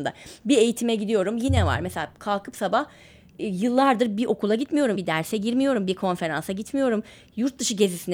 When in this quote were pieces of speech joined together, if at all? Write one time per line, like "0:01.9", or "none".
0:04.9